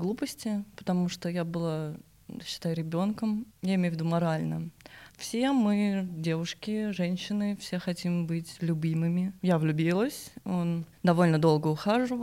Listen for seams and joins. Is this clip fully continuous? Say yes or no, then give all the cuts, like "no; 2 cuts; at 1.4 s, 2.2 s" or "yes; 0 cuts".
no; 2 cuts; at 3.5 s, 9.4 s